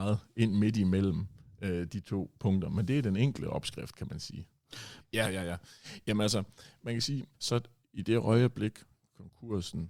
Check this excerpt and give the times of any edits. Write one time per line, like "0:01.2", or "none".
0:05.0
0:07.3